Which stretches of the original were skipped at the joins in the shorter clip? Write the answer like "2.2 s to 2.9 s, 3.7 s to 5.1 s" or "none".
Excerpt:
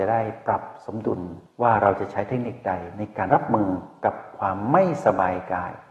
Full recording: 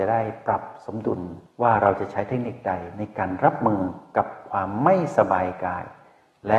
3.3 s to 3.4 s